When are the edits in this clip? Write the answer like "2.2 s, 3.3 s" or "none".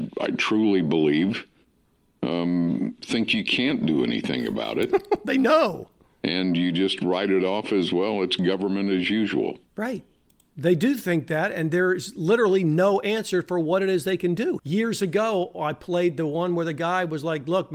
9.7 s, 14.6 s